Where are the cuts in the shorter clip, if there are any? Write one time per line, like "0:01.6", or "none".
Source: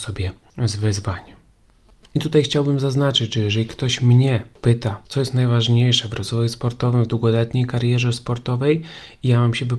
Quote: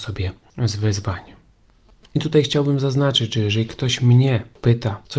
none